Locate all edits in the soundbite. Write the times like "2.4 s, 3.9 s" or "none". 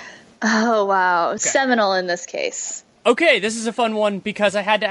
1.4 s